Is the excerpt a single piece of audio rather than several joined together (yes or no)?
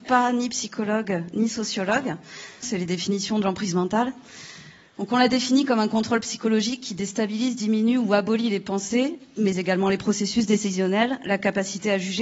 no